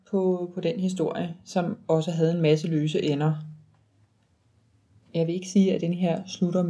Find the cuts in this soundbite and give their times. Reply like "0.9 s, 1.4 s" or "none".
none